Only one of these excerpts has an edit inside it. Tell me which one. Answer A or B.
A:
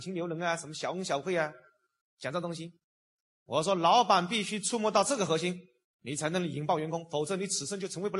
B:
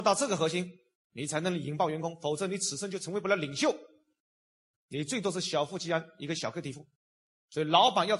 A